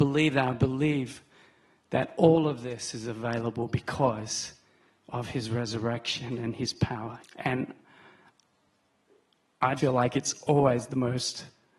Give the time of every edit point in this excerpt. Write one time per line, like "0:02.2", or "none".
0:07.2
0:09.8